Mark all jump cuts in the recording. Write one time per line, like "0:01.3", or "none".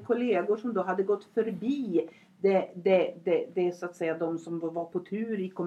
none